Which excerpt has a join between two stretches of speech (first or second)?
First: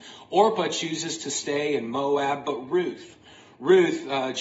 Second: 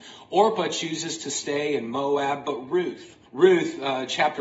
second